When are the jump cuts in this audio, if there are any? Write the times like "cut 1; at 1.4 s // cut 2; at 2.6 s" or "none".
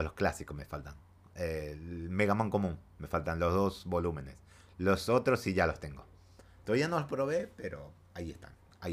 none